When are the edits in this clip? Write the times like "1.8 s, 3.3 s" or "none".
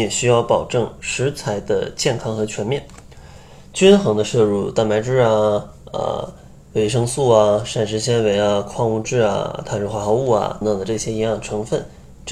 10.6 s